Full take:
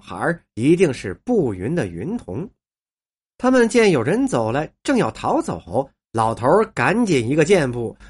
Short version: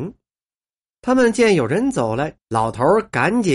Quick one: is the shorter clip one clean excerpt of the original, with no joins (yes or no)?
no